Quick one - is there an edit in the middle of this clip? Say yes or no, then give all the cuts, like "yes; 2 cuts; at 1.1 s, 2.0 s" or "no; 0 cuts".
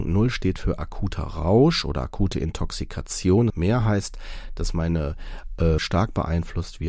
yes; 2 cuts; at 3.5 s, 5.8 s